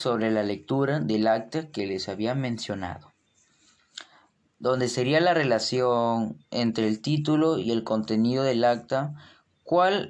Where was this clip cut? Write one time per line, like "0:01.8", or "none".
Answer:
none